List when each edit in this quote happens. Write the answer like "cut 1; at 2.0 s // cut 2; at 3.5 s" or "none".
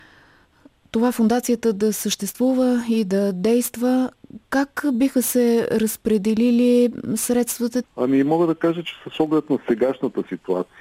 cut 1; at 7.8 s

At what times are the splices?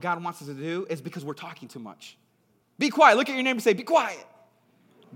cut 1; at 2.6 s

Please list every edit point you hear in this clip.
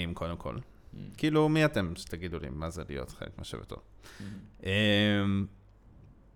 none

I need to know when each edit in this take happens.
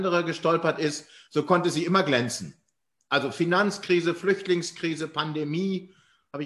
none

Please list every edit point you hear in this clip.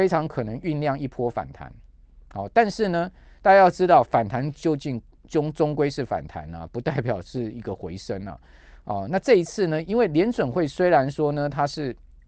cut 1; at 8.8 s // cut 2; at 9.8 s

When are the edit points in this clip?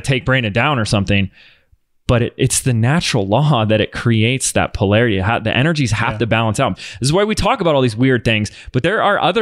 cut 1; at 6.7 s

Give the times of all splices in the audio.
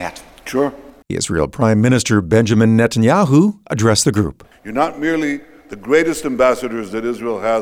cut 1; at 1.0 s // cut 2; at 4.5 s

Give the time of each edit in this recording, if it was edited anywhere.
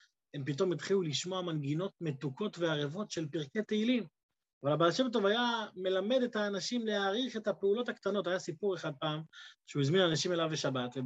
cut 1; at 4.6 s

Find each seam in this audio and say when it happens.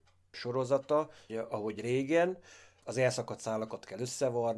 cut 1; at 1.3 s

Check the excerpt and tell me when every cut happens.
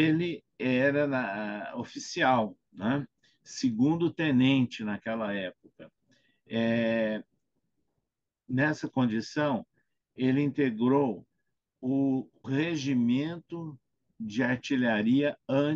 cut 1; at 12.4 s

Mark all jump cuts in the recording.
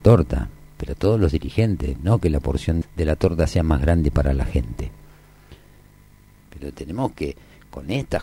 cut 1; at 2.8 s // cut 2; at 6.4 s

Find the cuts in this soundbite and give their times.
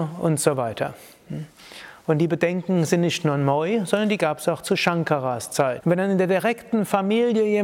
cut 1; at 5.8 s

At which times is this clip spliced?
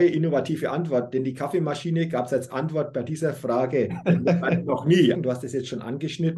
cut 1; at 5.1 s

